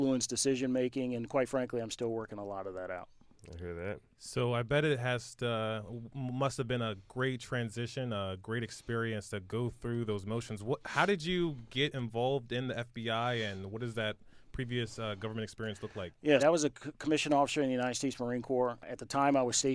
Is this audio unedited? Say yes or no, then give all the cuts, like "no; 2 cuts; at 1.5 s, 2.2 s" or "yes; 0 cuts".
no; 1 cut; at 16.4 s